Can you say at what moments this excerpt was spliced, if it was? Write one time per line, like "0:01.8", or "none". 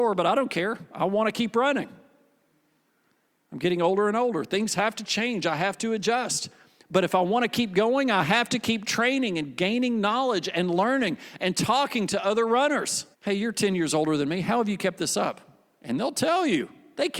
0:13.1